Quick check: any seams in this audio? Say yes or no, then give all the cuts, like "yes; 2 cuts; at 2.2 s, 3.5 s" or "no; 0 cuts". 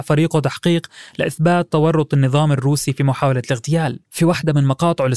yes; 1 cut; at 4.0 s